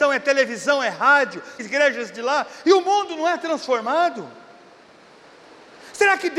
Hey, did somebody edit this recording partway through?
yes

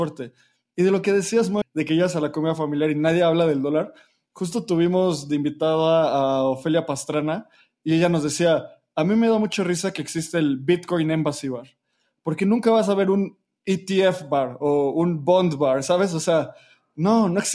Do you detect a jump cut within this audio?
yes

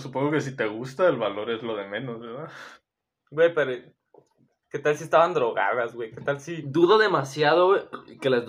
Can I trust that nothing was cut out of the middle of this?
yes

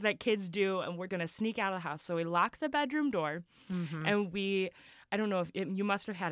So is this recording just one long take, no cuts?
no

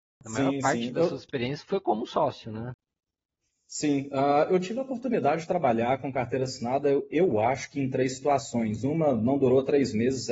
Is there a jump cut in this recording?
no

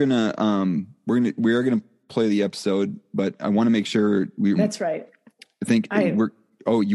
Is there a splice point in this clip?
yes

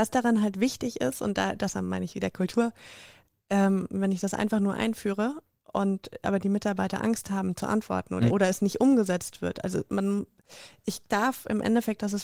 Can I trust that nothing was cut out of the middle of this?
no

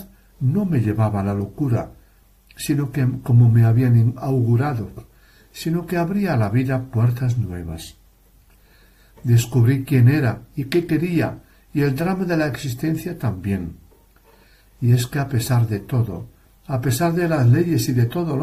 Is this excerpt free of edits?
yes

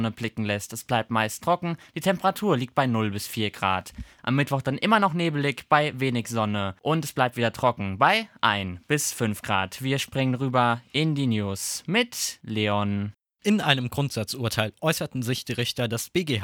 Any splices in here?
yes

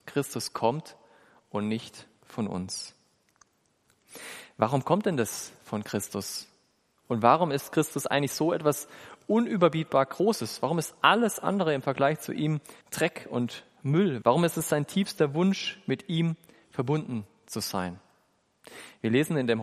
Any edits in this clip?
yes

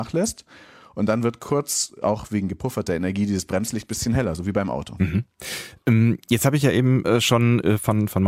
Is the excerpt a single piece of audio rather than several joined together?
yes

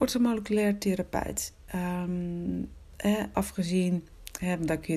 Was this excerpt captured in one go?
no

